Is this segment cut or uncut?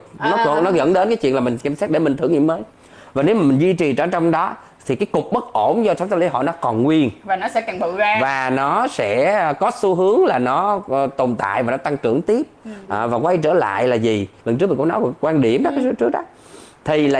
cut